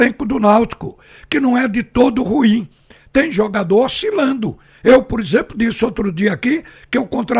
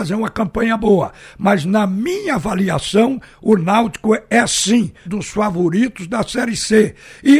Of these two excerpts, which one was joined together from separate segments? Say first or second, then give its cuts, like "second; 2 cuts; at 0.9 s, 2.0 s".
second; 1 cut; at 5.1 s